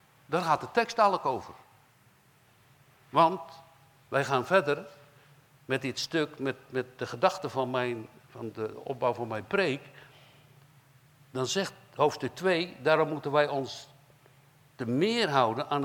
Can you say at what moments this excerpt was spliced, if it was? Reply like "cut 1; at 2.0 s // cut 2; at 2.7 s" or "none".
none